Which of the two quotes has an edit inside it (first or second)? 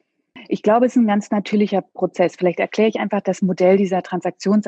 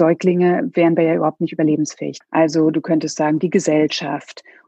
second